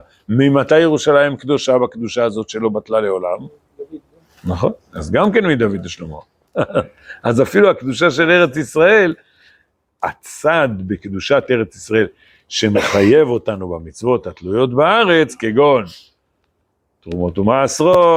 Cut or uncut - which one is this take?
cut